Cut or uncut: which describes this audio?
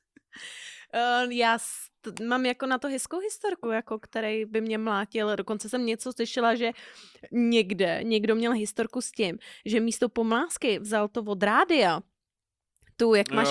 cut